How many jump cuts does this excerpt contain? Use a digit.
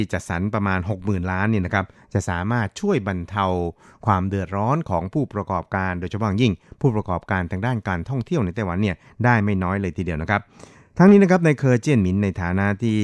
0